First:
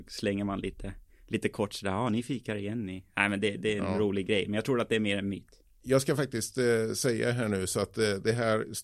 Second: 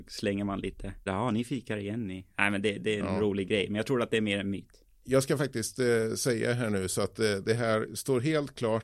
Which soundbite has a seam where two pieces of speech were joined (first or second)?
second